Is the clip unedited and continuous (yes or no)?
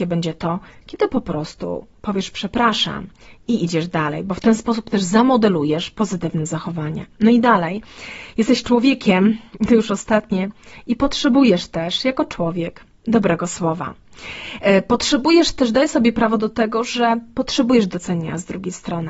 yes